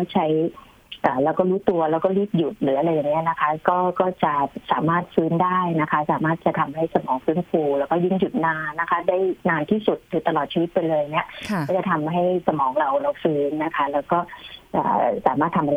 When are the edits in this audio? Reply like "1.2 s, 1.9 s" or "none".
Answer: 8.7 s

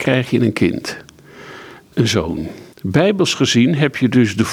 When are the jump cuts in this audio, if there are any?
2.7 s

